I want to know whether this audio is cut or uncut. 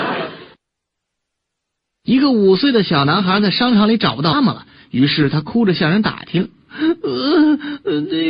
cut